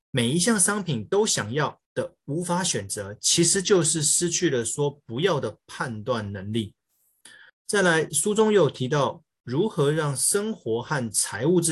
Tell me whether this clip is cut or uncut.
cut